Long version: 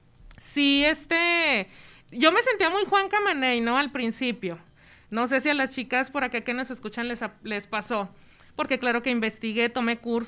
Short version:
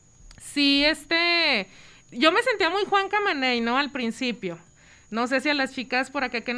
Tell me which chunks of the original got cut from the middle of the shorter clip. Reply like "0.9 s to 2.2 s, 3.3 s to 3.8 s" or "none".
none

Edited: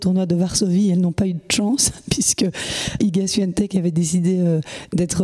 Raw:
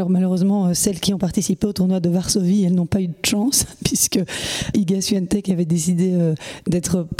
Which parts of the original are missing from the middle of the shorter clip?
none

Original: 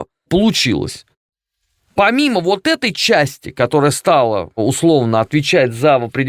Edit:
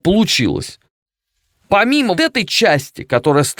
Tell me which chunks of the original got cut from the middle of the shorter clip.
2.4 s to 2.6 s

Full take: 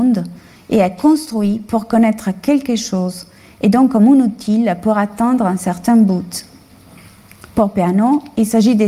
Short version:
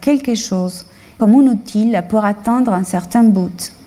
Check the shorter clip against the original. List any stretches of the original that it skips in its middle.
3.6 s to 3.9 s

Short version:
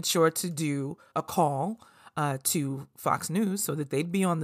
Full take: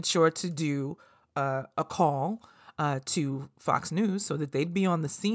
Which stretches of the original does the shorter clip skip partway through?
1.1 s to 1.7 s

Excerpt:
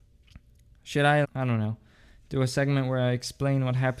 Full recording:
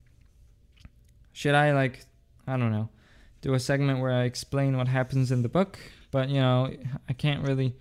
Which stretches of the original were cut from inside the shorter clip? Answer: 1.7 s to 2.4 s

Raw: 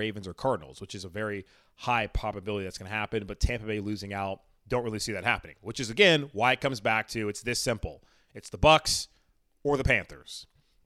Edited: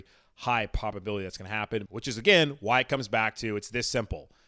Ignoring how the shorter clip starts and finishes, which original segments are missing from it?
3.3 s to 5.6 s

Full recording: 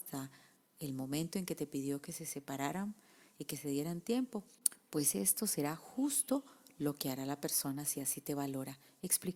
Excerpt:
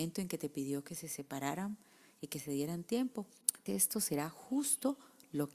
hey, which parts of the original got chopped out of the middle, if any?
4.8 s to 5.1 s

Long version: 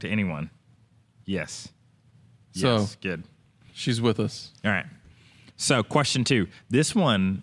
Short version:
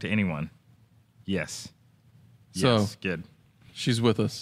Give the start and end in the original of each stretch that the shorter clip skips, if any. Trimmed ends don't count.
none

